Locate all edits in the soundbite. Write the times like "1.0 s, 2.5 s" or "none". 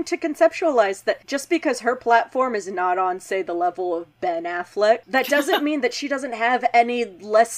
5.0 s